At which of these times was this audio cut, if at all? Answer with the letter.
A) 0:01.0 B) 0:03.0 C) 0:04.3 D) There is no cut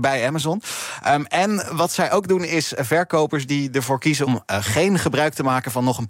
C